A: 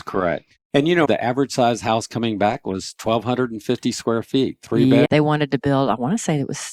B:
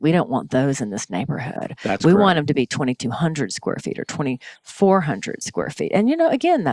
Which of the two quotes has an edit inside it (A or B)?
A